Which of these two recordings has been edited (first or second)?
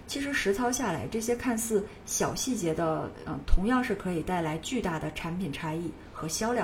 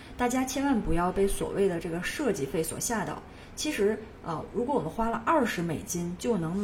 first